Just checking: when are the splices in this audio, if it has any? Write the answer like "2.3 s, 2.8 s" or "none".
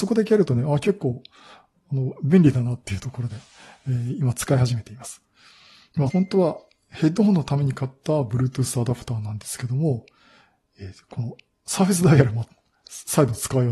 6.1 s